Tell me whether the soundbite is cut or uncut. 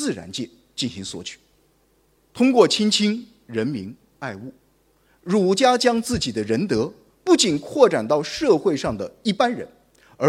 cut